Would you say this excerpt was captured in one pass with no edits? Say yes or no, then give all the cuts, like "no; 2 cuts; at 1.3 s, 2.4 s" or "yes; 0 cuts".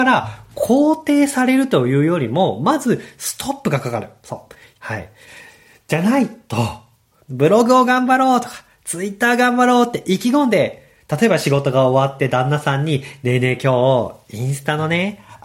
no; 2 cuts; at 4.7 s, 7.2 s